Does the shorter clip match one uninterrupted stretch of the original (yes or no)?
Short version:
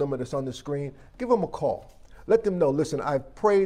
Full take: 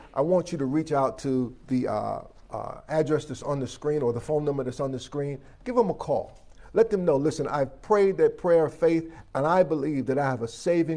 yes